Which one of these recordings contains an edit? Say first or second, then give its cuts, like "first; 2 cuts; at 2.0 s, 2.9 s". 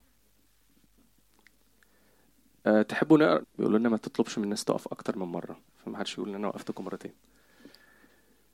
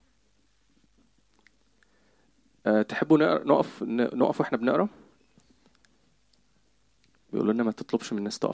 first; 2 cuts; at 3.4 s, 5.7 s